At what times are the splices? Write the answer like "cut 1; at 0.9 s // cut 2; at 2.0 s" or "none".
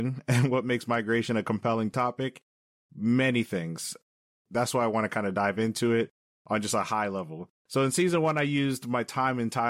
cut 1; at 7.6 s